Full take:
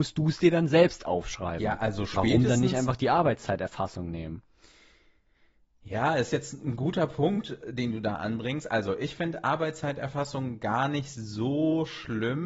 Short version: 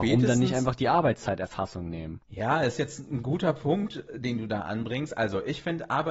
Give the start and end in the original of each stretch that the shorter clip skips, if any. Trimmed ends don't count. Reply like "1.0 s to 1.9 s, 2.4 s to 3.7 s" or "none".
4.4 s to 5.8 s